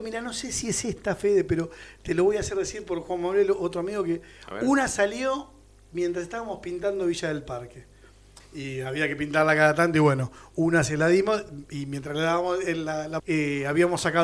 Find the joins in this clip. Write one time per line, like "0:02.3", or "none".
0:08.4
0:13.2